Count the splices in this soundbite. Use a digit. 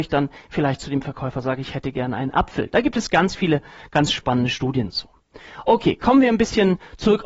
0